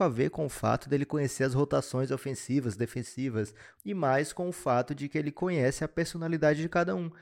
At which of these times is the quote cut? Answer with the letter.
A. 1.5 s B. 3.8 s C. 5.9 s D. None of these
B